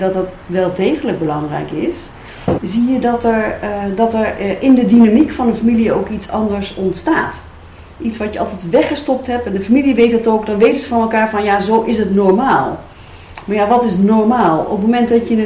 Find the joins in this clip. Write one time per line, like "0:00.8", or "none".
0:02.6